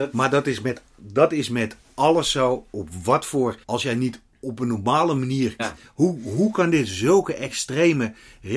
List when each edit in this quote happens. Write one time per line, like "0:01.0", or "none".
0:03.6
0:05.6